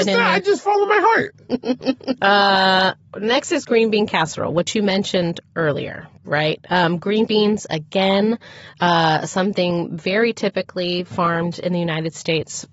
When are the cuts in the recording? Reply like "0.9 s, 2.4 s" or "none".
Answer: 2.2 s